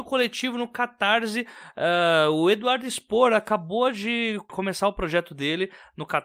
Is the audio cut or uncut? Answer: uncut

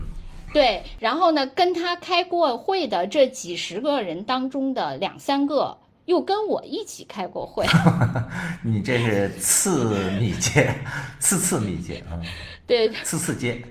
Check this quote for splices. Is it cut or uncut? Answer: uncut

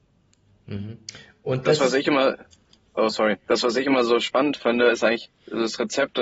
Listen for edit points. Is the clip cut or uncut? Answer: uncut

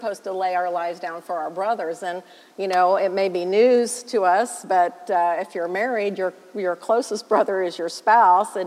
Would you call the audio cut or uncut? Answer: uncut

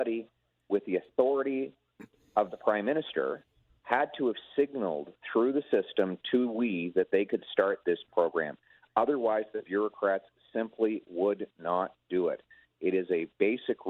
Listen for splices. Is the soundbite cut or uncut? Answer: uncut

